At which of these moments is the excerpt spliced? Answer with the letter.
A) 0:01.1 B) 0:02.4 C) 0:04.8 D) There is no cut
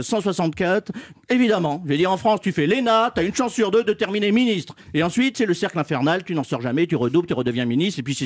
A